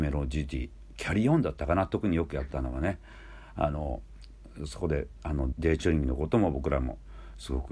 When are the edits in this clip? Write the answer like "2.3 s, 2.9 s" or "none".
5.5 s